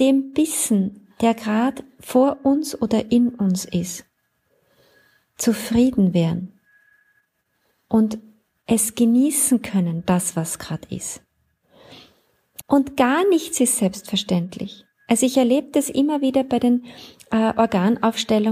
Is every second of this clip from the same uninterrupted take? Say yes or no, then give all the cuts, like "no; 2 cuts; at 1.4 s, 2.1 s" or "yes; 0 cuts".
no; 1 cut; at 12.6 s